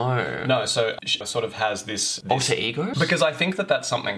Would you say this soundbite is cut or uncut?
cut